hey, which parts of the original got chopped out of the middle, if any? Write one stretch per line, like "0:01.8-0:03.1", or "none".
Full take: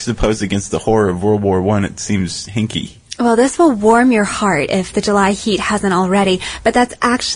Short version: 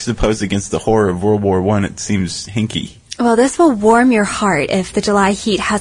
none